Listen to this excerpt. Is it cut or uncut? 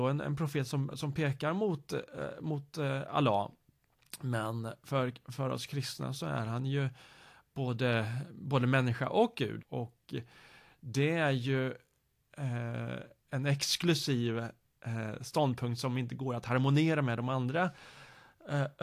cut